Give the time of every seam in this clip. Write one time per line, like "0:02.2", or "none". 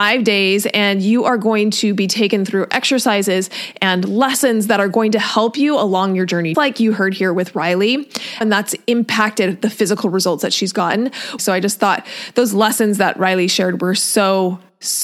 0:06.5
0:08.4
0:11.4